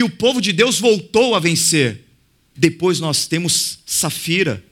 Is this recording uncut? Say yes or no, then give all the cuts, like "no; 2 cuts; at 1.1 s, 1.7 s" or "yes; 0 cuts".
no; 1 cut; at 2.5 s